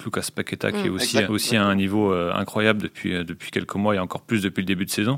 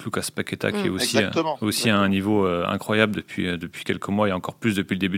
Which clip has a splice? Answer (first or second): first